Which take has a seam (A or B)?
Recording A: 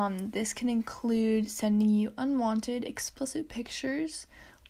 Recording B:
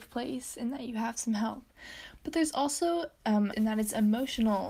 B